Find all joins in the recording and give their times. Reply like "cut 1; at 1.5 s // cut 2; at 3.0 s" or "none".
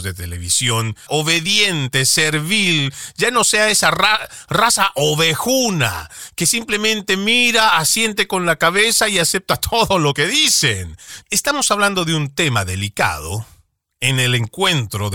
cut 1; at 1.1 s // cut 2; at 11.2 s